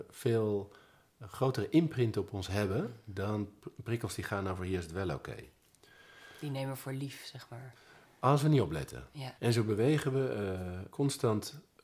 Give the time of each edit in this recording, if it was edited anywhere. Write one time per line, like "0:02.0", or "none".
0:09.4
0:10.9

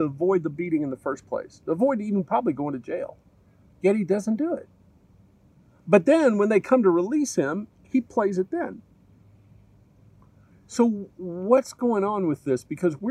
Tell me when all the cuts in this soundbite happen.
none

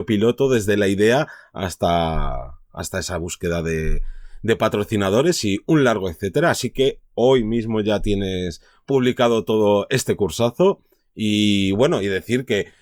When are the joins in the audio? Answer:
none

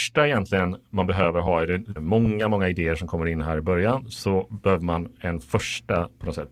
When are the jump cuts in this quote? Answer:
0:02.0

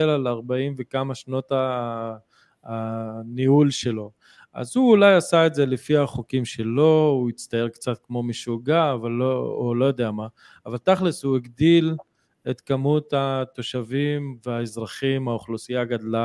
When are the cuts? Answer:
none

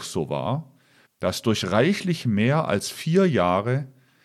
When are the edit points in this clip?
0:01.1

